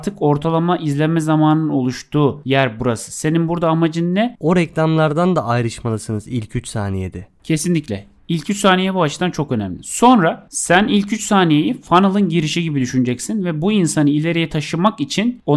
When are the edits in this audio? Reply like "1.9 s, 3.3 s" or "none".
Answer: 4.4 s